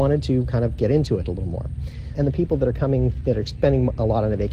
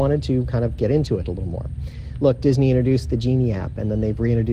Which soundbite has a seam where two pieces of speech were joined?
first; 1 cut; at 2.1 s

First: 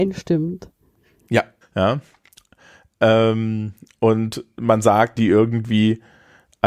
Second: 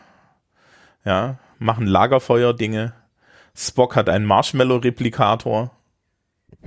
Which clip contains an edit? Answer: first; 2 cuts; at 1.6 s, 5.2 s

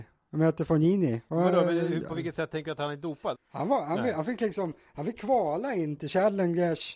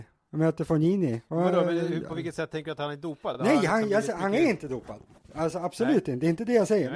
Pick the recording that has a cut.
first; 1 cut; at 3.3 s

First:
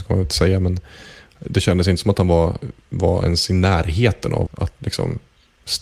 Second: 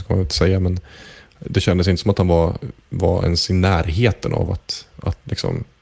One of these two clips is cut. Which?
first; 1 cut; at 4.5 s

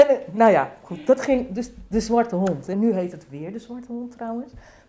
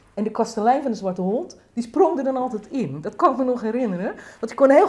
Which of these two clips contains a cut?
first; 1 cut; at 2.7 s

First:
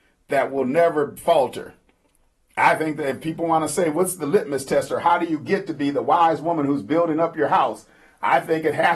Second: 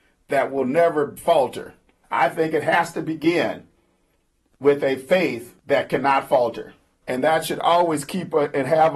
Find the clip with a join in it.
second; 3 cuts; at 2.0 s, 5.6 s, 7.0 s

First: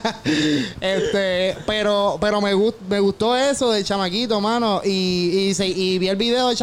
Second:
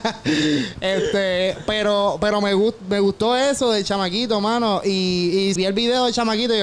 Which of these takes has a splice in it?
second; 1 cut; at 5.6 s

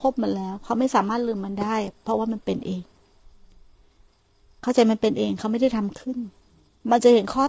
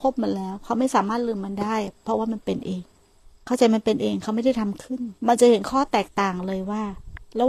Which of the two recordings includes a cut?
second; 2 cuts; at 3.4 s, 5.2 s

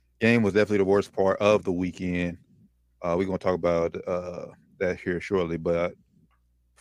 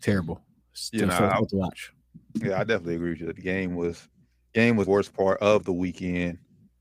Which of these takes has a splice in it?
second; 1 cut; at 4.9 s

